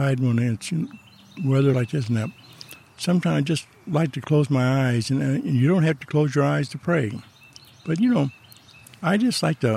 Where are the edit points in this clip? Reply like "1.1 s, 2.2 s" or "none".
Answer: none